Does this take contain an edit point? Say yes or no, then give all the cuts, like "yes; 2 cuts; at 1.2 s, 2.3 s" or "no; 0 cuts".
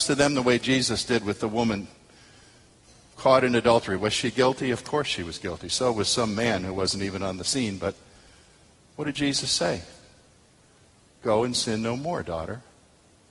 no; 0 cuts